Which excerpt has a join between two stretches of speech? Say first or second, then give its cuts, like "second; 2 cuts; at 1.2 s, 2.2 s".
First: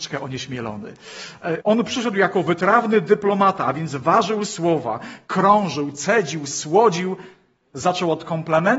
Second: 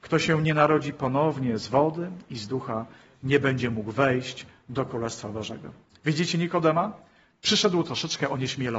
first; 1 cut; at 1.6 s